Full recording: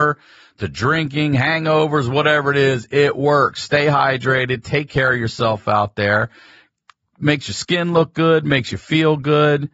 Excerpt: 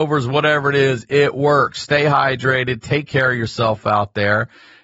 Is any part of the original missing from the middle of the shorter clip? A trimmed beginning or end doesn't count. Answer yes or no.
no